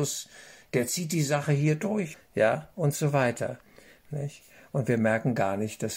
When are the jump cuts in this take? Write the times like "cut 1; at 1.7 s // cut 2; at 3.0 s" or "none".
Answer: cut 1; at 2.1 s